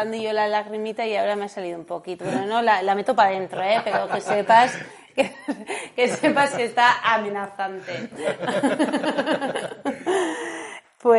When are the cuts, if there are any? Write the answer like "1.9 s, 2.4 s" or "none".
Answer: none